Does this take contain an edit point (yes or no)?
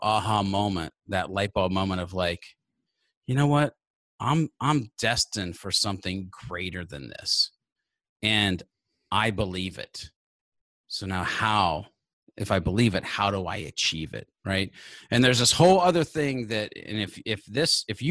no